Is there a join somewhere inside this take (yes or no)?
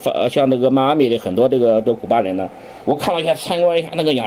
yes